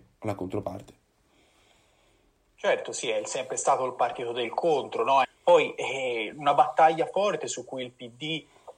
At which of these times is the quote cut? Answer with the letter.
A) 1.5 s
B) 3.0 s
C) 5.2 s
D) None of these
C